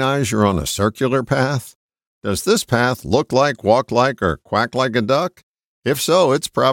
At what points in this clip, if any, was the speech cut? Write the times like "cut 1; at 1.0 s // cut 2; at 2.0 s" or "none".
cut 1; at 2.1 s